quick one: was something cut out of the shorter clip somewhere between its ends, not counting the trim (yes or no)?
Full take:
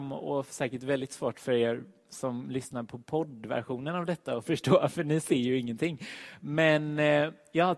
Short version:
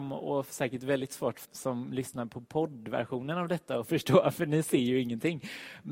yes